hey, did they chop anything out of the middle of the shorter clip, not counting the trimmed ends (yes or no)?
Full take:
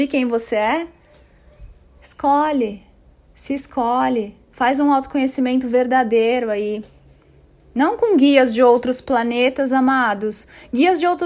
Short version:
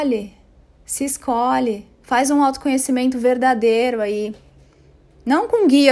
no